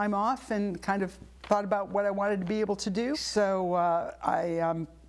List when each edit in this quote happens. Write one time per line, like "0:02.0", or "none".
0:01.4
0:03.1